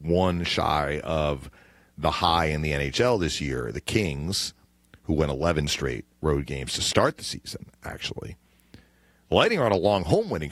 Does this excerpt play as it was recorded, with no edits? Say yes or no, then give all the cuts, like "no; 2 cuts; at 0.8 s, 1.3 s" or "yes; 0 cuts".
yes; 0 cuts